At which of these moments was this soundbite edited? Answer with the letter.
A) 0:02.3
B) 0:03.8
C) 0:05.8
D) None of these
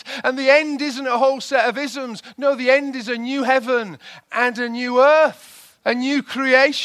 C